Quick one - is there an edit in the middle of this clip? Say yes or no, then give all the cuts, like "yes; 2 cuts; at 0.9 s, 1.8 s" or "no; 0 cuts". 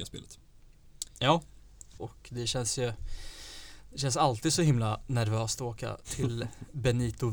yes; 1 cut; at 2.0 s